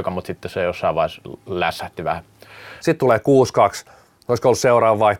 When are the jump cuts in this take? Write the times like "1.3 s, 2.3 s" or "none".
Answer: 2.8 s